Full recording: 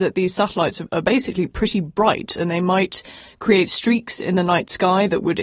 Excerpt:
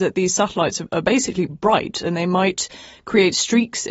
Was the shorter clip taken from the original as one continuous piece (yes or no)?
no